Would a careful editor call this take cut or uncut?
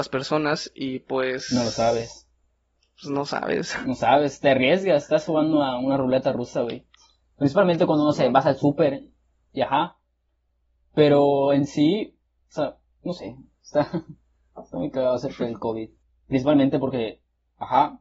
uncut